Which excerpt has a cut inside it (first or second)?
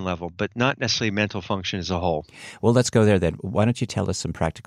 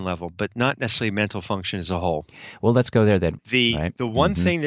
second